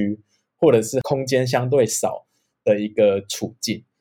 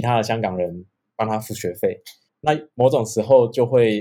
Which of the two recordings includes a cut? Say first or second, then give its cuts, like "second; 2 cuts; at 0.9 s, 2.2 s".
second; 1 cut; at 2.3 s